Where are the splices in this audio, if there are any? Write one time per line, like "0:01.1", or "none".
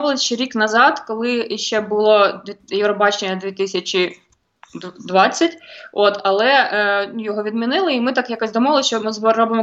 none

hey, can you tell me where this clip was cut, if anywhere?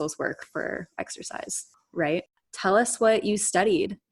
0:02.4

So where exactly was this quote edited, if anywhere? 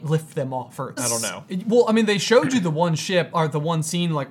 0:01.0

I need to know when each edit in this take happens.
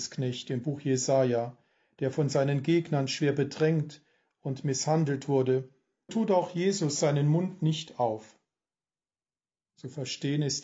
0:06.1

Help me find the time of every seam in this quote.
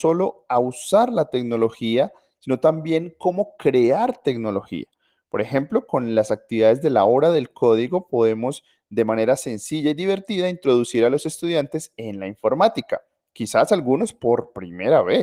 none

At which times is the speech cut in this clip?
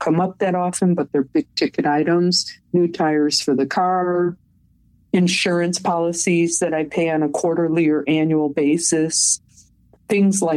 none

